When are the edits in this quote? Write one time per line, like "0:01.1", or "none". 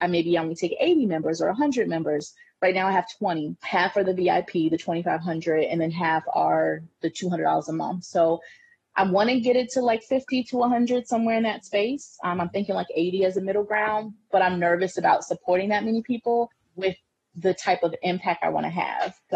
none

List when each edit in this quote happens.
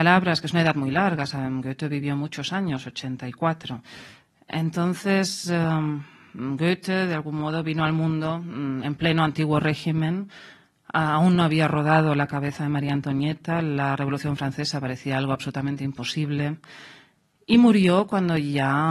none

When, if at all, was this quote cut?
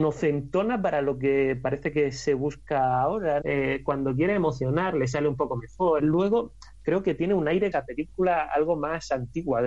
0:03.4
0:06.0
0:07.7

